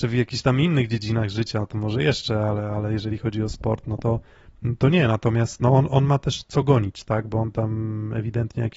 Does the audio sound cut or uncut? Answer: uncut